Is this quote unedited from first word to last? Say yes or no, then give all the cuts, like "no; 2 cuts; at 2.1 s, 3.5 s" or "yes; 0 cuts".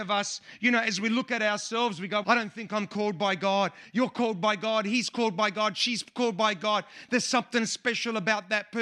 no; 1 cut; at 2.2 s